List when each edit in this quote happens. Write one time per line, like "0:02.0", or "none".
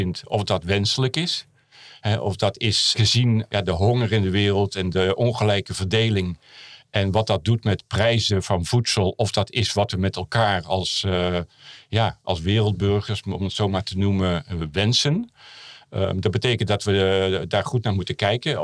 none